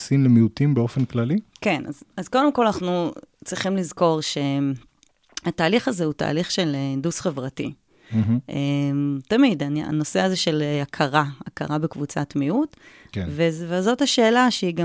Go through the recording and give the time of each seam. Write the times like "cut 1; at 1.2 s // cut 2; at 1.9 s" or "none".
none